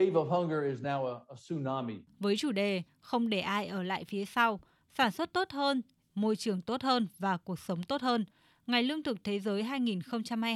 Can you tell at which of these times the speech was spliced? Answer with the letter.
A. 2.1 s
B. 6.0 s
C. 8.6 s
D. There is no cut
B